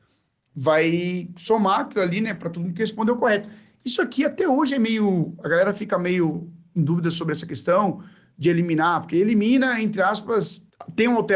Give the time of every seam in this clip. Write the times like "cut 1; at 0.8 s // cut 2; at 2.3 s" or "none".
none